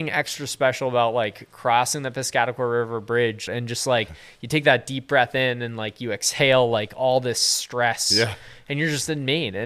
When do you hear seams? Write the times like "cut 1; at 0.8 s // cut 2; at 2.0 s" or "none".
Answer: cut 1; at 3.5 s